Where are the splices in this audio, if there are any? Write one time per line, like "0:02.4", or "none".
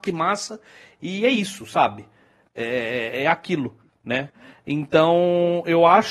none